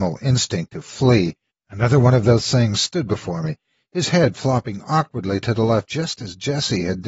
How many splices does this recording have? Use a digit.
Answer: 1